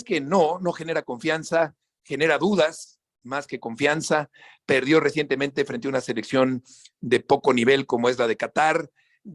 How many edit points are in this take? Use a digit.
0